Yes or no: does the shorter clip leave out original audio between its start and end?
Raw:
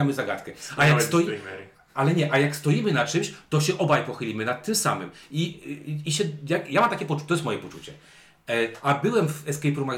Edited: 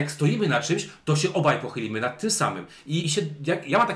yes